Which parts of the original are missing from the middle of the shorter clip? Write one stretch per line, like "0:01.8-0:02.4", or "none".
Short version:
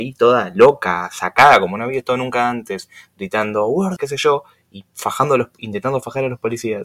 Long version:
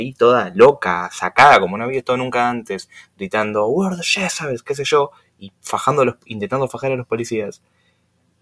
0:04.0-0:04.6